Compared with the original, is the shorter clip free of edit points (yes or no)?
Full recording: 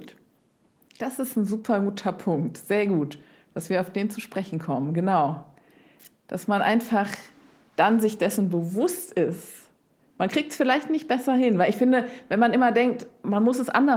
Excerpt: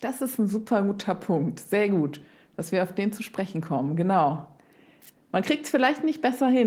no